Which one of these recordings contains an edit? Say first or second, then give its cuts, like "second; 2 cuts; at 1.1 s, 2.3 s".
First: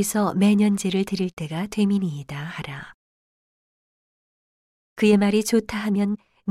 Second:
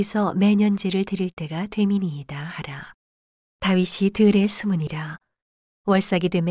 second; 1 cut; at 3.5 s